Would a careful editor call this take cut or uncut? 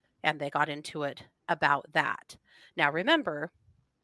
uncut